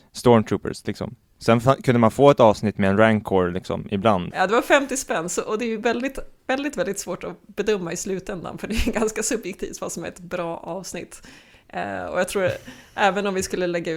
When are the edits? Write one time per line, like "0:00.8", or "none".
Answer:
0:04.3